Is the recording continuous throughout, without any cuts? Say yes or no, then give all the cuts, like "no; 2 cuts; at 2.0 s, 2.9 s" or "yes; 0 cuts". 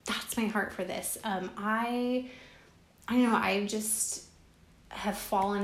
yes; 0 cuts